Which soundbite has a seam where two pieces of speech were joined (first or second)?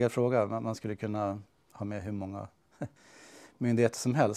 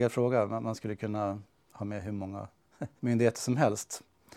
second